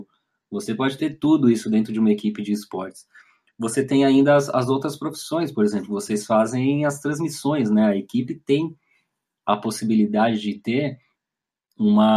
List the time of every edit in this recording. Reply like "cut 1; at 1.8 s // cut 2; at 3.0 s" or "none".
none